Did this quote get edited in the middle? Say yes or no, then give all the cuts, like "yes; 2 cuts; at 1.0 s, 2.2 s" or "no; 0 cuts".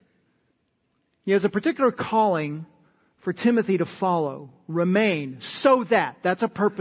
no; 0 cuts